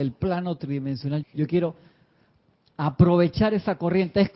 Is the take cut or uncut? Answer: cut